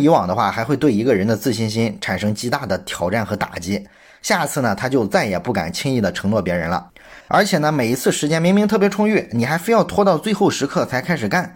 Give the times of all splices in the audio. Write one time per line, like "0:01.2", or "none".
0:07.2